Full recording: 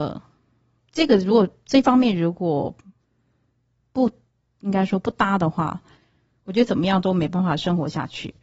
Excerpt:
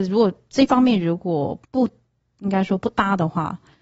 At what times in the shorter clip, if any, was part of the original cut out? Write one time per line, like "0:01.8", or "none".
0:01.6